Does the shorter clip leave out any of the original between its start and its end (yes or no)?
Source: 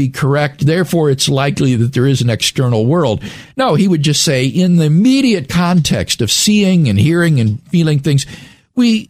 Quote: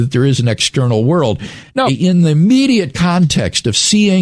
yes